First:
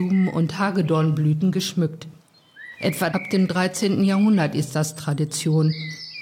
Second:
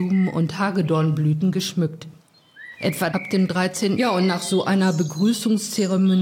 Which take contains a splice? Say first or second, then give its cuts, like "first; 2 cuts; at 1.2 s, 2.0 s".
second; 1 cut; at 4.0 s